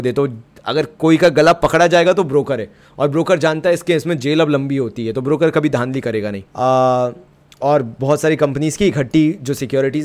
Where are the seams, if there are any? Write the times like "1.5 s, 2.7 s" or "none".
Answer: 6.5 s